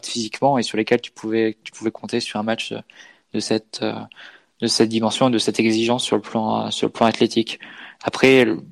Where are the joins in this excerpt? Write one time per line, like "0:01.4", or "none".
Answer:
none